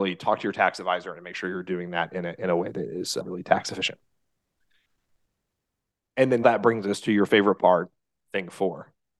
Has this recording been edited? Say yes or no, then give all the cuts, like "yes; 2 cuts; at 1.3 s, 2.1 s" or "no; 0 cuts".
yes; 1 cut; at 6.4 s